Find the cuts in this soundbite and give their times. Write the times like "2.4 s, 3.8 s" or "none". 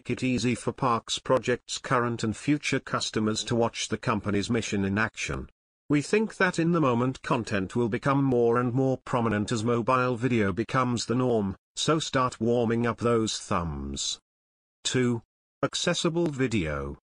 none